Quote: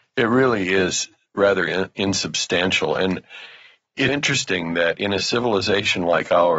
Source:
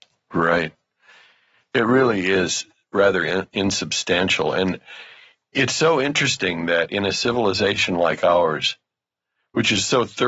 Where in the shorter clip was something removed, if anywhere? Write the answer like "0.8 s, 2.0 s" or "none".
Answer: 4.1 s